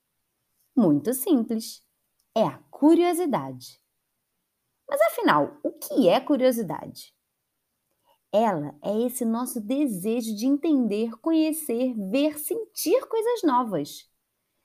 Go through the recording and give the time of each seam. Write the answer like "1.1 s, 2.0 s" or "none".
none